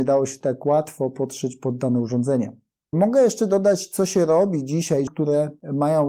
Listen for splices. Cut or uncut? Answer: cut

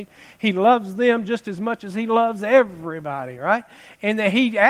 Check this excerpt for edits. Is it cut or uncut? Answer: uncut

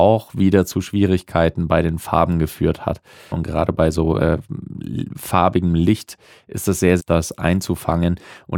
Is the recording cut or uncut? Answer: cut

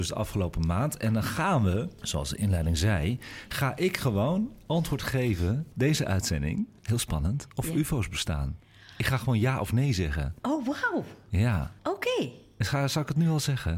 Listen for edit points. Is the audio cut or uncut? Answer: cut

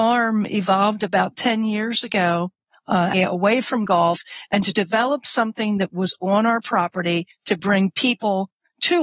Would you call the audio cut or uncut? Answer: cut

